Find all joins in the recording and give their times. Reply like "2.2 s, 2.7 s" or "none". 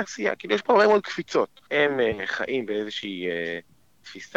1.7 s

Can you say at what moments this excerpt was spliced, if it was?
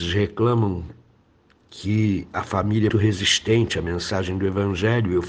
2.9 s

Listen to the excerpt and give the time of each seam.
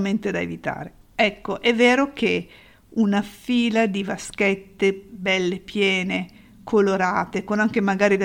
1.1 s

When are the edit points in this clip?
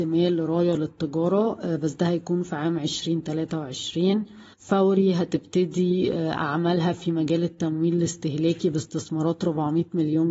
4.5 s

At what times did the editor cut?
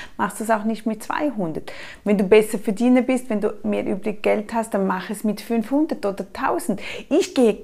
none

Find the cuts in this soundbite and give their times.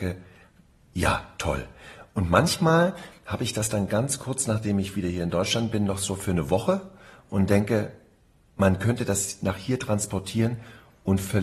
none

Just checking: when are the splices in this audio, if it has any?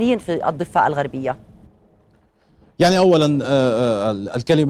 none

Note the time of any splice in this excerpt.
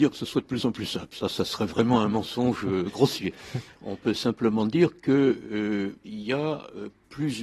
none

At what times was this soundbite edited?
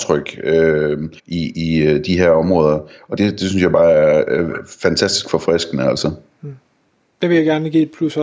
1.2 s, 3.2 s

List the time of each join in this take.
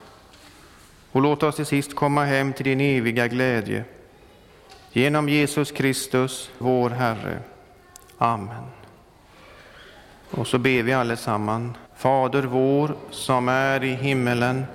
6.6 s, 11.9 s

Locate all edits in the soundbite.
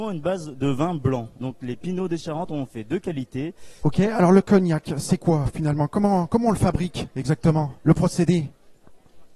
1.4 s, 3.8 s

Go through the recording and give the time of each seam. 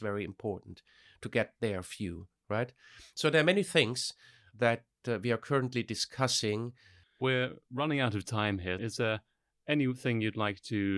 7.0 s, 8.8 s

